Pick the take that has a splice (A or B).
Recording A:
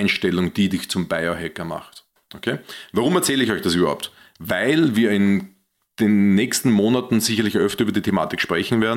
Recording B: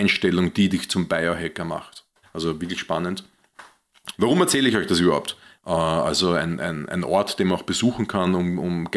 B